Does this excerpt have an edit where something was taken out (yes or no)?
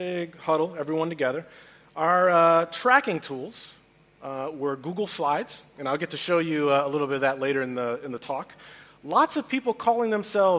no